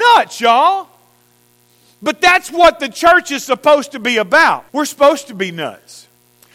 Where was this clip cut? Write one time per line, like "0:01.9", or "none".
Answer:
0:04.7